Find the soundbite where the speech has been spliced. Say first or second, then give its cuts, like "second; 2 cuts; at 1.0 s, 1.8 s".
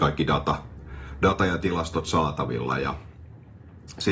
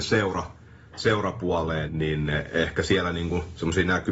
second; 1 cut; at 1.9 s